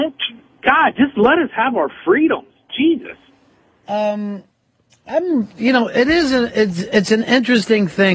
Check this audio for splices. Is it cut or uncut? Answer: uncut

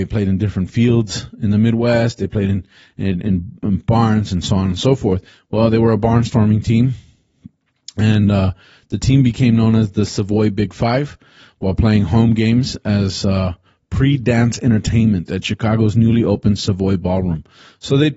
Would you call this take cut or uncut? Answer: uncut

